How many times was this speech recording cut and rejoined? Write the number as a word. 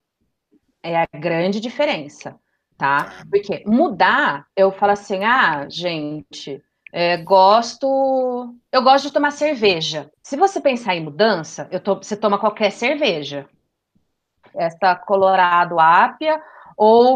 two